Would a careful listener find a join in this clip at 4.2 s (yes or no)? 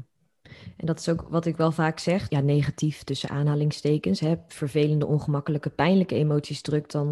no